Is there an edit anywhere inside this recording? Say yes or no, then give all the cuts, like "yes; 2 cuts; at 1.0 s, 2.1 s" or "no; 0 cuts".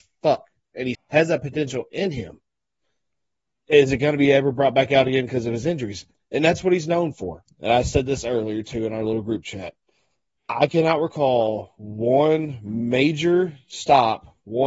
yes; 3 cuts; at 0.9 s, 6.1 s, 7.5 s